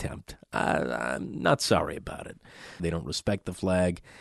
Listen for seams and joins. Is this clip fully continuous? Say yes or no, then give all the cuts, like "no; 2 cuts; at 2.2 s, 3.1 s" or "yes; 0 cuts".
no; 1 cut; at 2.8 s